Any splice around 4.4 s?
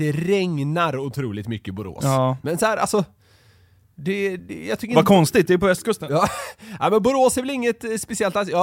yes; 1 cut; at 4.4 s

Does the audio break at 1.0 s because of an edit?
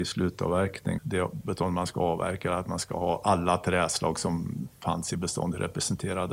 yes; 1 cut; at 1.0 s

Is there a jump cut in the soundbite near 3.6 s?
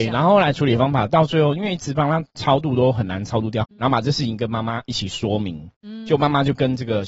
yes; 1 cut; at 3.6 s

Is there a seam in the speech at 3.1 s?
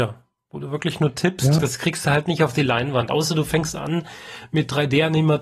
no; 1 cut; at 1.6 s

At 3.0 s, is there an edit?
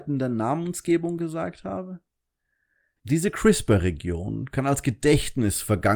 yes; 1 cut; at 3.0 s

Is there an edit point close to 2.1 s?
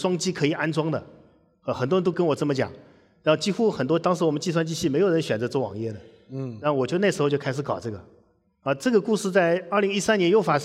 yes; 1 cut; at 2.1 s

